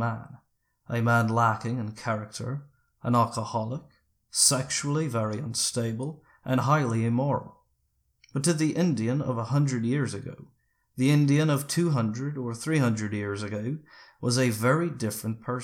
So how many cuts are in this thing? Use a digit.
0